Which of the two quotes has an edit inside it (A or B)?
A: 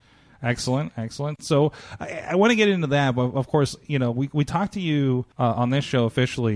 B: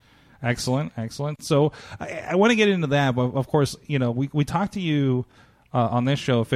A